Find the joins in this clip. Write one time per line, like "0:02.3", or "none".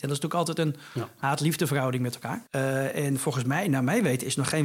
0:02.5